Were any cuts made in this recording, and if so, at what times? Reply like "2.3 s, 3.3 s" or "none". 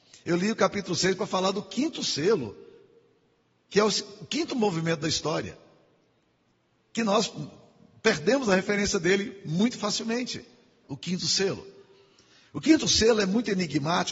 10.8 s

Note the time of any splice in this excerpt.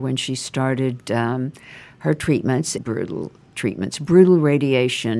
2.8 s

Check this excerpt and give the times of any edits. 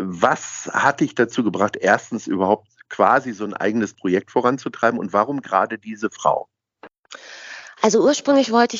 none

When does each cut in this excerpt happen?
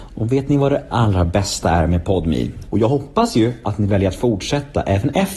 0.9 s, 2.7 s

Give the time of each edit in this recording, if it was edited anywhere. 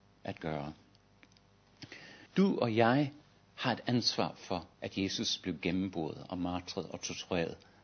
2.3 s, 4.7 s

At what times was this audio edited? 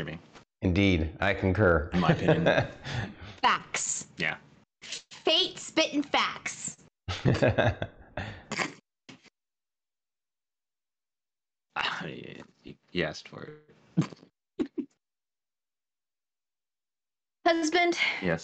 none

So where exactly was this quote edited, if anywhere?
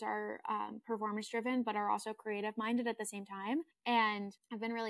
none

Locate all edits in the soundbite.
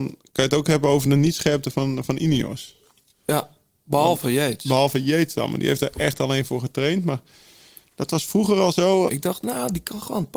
9.1 s

